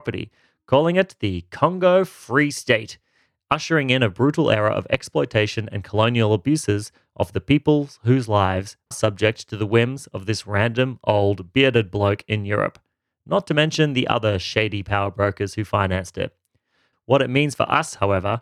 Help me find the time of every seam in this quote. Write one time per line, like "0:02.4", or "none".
0:08.9
0:16.9